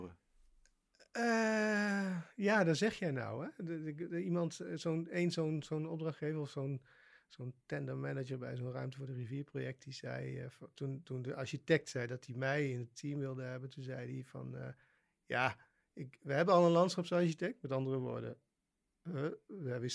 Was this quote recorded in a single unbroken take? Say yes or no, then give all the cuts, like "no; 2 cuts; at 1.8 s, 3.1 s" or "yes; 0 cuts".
yes; 0 cuts